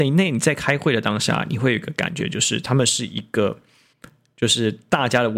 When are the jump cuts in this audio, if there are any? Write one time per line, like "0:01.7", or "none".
0:03.9